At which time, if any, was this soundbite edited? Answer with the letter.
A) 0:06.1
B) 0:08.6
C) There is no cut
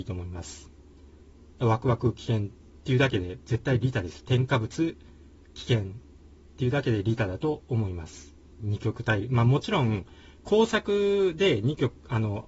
B